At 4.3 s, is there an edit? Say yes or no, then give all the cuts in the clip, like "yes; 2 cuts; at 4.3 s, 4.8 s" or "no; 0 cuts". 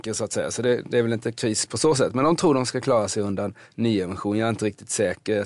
no; 0 cuts